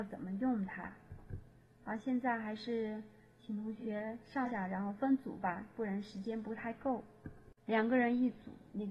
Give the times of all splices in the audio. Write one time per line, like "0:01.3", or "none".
0:07.6